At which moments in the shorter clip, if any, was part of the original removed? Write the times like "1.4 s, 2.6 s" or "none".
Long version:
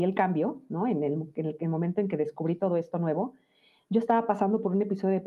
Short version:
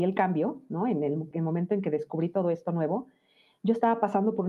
1.3 s